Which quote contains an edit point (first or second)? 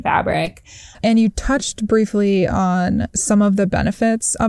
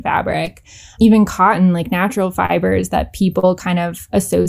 first